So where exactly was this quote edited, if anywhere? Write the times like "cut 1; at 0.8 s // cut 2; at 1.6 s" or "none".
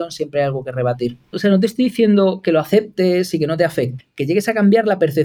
cut 1; at 1.3 s // cut 2; at 4.0 s